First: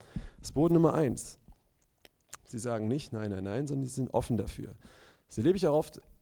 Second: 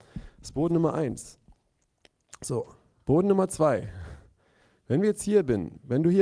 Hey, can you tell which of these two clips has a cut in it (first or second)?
first